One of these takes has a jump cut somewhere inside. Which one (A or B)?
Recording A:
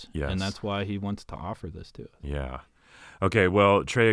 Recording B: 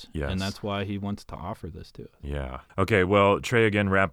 B